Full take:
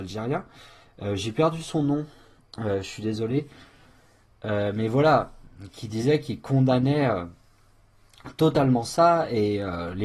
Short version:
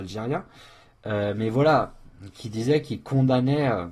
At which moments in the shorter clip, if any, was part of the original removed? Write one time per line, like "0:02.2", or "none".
0:00.9